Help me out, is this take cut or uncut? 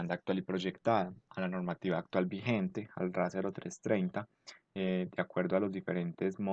cut